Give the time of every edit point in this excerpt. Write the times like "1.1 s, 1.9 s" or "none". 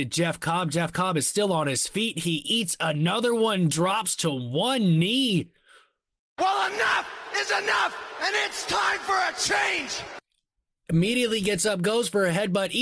none